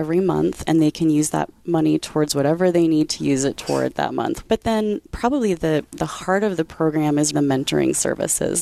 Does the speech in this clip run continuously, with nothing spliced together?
no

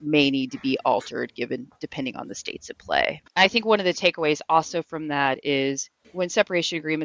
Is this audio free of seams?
no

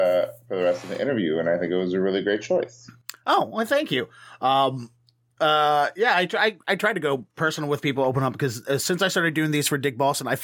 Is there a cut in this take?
no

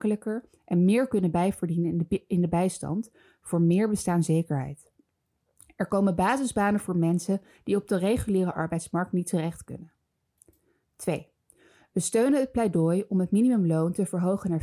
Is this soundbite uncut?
yes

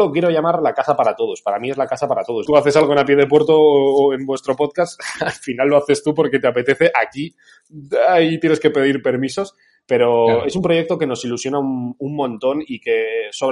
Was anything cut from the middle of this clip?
yes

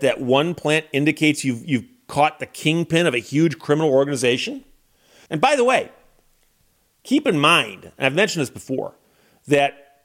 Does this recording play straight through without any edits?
no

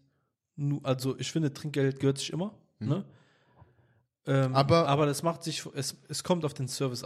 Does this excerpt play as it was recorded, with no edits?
yes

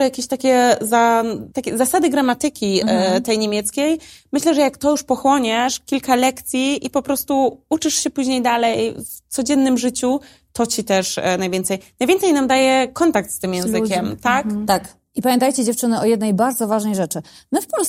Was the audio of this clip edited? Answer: yes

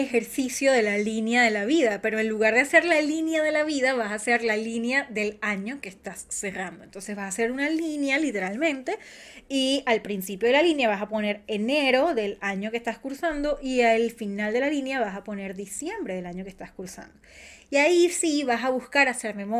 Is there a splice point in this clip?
no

